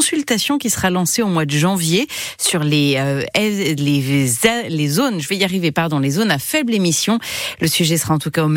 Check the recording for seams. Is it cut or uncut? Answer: uncut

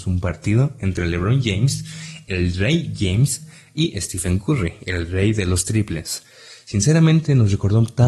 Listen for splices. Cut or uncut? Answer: uncut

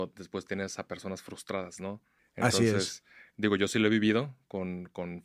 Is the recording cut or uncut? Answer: uncut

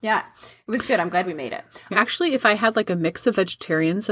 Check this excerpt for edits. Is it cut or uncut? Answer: cut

